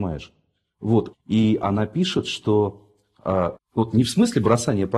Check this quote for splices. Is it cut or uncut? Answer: cut